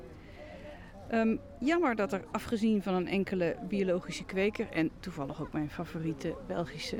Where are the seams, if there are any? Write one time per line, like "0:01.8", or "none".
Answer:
none